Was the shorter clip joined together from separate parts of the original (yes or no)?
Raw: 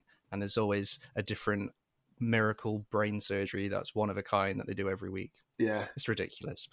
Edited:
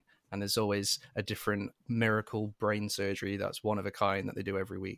yes